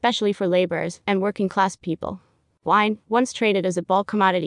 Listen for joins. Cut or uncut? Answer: cut